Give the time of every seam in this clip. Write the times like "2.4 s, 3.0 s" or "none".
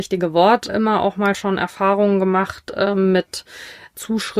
none